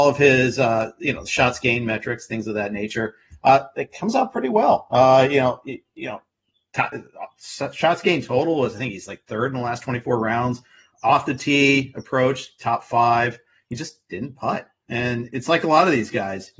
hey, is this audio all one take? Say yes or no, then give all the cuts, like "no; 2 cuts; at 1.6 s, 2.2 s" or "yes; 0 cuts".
yes; 0 cuts